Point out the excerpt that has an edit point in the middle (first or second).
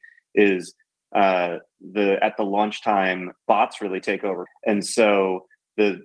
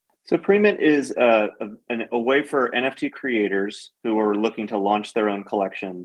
first